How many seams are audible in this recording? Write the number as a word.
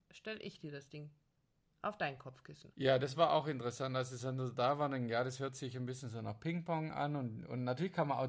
one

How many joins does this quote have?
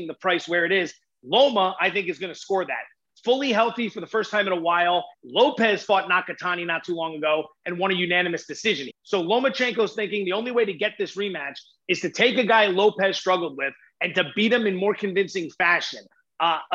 two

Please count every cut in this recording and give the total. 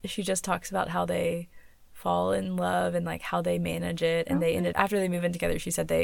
one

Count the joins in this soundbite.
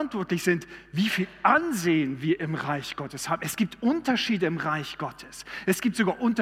zero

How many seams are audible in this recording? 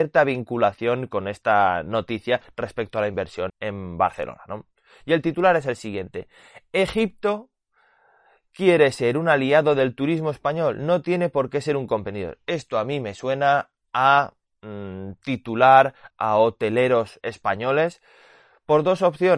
three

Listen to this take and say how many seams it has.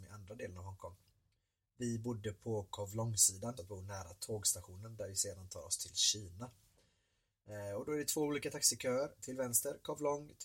one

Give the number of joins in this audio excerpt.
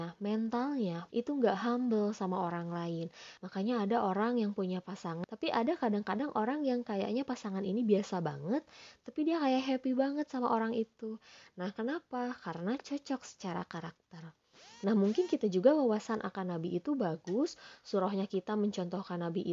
three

